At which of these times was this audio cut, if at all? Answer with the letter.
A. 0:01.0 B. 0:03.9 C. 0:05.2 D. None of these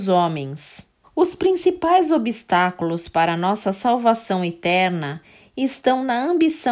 A